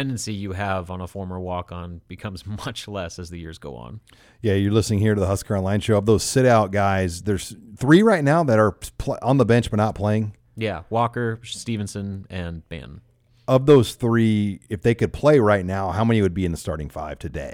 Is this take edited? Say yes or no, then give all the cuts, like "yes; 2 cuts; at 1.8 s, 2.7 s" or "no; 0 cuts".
no; 0 cuts